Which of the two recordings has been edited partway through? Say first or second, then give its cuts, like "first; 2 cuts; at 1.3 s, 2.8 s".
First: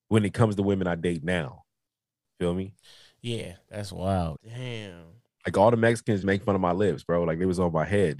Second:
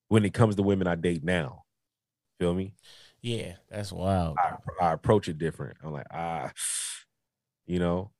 first; 2 cuts; at 4.4 s, 6.2 s